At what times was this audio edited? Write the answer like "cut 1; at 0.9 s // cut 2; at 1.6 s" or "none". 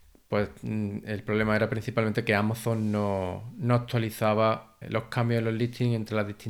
cut 1; at 4.8 s